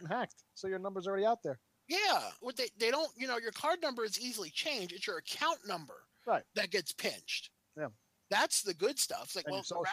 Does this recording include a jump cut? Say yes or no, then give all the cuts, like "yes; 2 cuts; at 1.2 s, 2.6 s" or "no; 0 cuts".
yes; 1 cut; at 2.4 s